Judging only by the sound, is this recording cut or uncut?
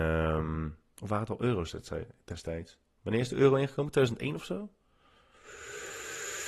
uncut